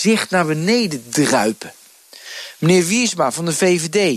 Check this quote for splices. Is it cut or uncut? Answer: uncut